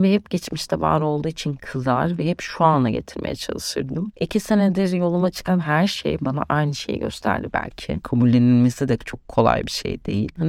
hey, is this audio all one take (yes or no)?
no